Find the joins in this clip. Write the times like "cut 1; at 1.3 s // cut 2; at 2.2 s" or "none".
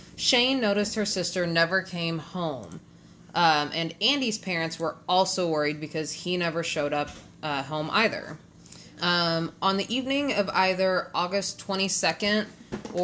cut 1; at 9.0 s